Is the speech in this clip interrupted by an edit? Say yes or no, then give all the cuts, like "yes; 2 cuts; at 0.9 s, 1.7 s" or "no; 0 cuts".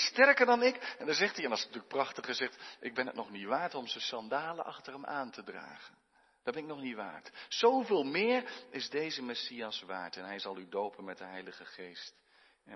no; 0 cuts